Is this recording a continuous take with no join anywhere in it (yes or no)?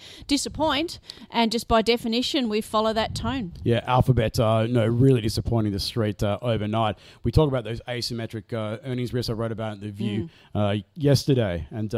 yes